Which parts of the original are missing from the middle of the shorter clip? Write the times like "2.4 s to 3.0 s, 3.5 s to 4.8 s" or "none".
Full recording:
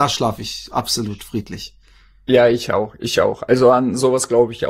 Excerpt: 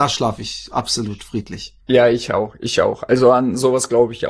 1.8 s to 2.2 s